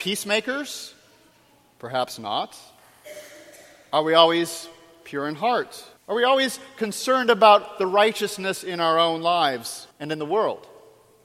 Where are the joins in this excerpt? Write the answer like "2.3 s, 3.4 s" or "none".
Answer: 6.0 s, 9.9 s